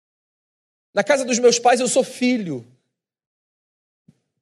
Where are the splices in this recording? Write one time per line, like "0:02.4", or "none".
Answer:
none